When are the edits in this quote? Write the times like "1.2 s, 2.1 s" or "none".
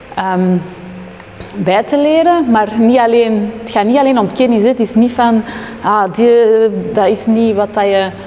6.9 s